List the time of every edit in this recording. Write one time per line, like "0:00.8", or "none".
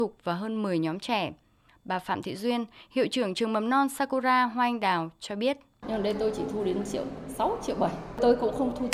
0:01.7
0:05.8